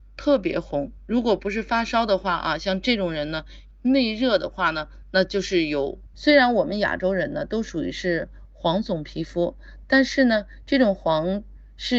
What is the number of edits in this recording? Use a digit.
2